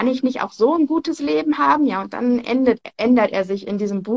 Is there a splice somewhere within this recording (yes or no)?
no